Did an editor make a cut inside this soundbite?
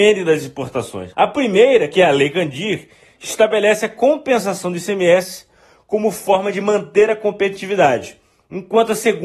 yes; 1 cut; at 1.1 s

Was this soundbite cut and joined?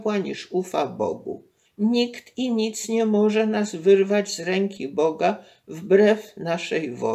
yes; 1 cut; at 1.6 s

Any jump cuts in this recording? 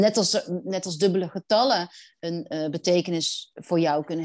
no; 0 cuts

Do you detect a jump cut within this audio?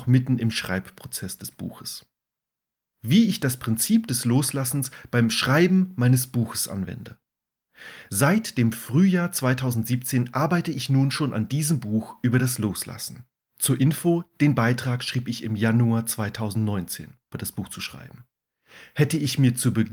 yes; 1 cut; at 17.3 s

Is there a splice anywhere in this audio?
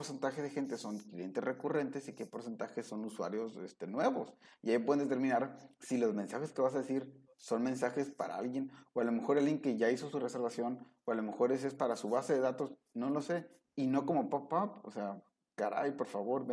no; 0 cuts

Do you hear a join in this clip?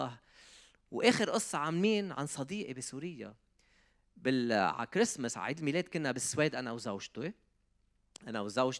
no; 0 cuts

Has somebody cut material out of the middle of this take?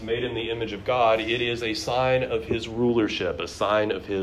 no; 0 cuts

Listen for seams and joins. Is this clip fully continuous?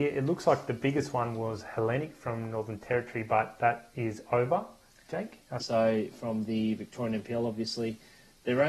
no; 1 cut; at 5.6 s

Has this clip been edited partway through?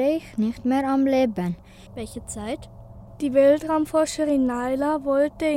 yes; 1 cut; at 1.9 s

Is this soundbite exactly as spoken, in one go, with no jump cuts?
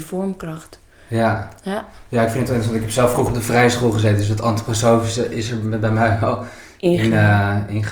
yes; 0 cuts

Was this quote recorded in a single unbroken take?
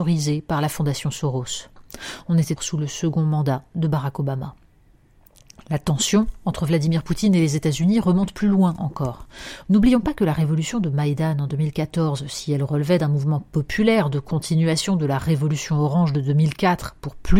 no; 2 cuts; at 2.6 s, 9.6 s

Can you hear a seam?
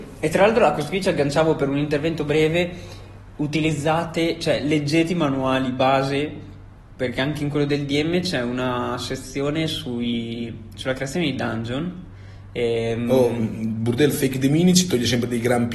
no; 0 cuts

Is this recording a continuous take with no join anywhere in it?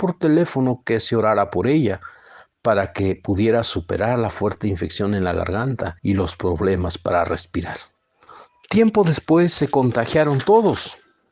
no; 2 cuts; at 6.0 s, 8.6 s

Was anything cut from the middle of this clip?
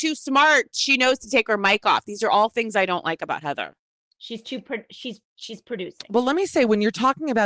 no; 0 cuts

